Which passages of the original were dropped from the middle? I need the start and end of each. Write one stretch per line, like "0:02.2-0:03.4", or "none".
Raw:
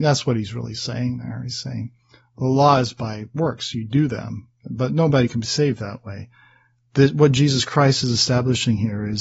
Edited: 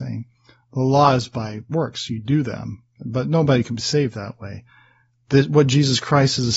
none